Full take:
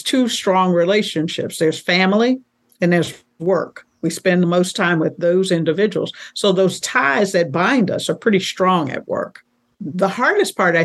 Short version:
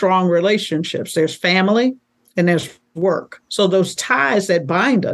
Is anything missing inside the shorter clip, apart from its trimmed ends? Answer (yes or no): yes